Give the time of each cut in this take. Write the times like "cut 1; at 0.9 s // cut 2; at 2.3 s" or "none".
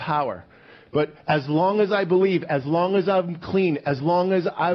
none